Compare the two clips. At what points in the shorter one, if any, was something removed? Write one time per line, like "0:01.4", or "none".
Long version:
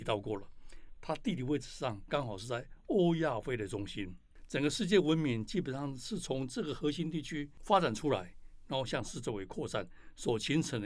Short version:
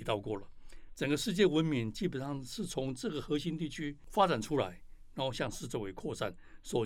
0:00.9